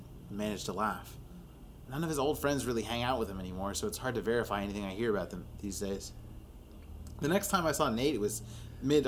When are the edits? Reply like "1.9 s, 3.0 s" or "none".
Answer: 1.9 s